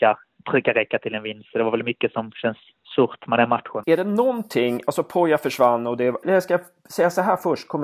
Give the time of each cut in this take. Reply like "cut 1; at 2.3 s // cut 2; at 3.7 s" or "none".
cut 1; at 3.8 s // cut 2; at 6.2 s